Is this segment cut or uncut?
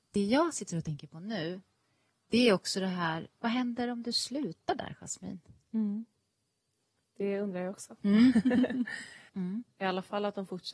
cut